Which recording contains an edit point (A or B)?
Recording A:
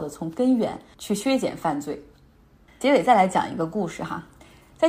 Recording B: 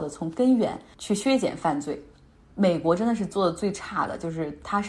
B